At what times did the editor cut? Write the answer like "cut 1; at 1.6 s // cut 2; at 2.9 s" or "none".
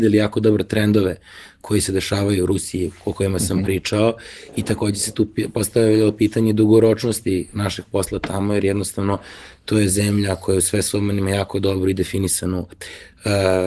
cut 1; at 7.5 s

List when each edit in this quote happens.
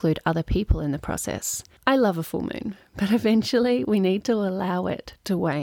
cut 1; at 1.8 s

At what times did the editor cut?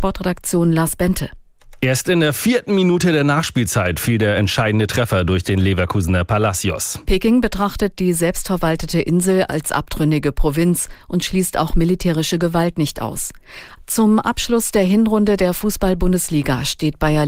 cut 1; at 7.1 s // cut 2; at 13.8 s

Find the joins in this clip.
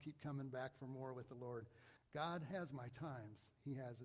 cut 1; at 2.0 s

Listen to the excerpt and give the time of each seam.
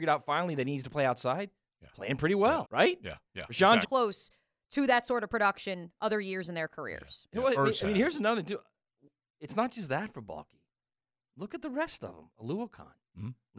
cut 1; at 2.6 s // cut 2; at 3.8 s

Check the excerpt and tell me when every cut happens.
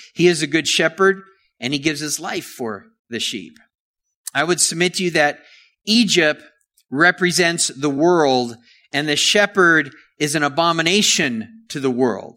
none

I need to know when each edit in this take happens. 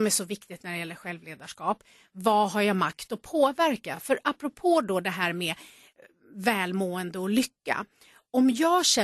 none

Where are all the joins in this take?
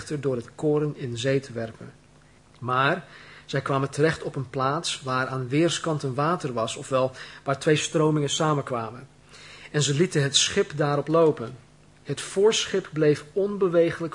cut 1; at 2.4 s

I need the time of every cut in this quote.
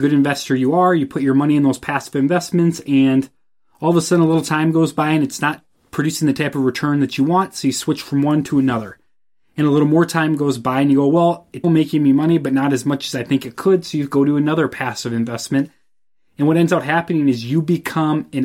cut 1; at 11.6 s

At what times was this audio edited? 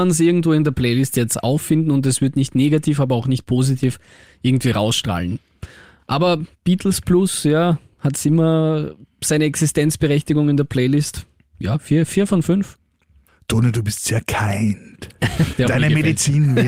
cut 1; at 15.5 s

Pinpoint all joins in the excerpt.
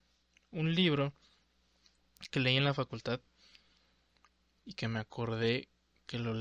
none

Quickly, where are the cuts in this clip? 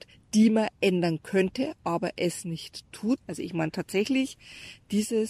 cut 1; at 3.2 s

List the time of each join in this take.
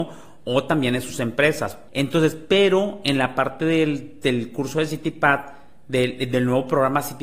cut 1; at 1.9 s

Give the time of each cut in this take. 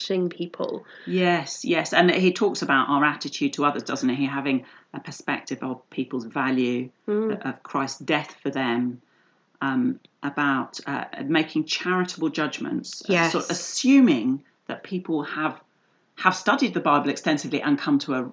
none

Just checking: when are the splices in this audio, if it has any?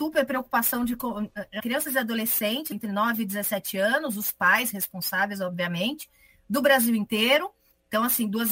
cut 1; at 1.6 s // cut 2; at 2.7 s

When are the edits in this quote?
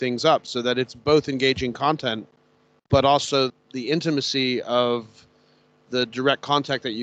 cut 1; at 3.5 s

